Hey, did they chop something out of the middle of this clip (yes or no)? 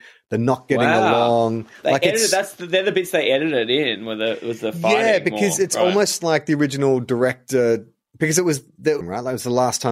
yes